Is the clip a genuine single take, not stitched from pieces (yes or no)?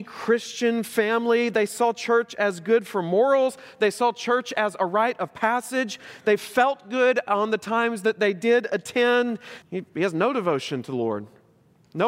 no